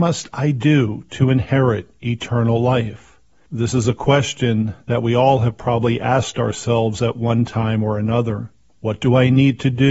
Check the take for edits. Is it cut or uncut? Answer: uncut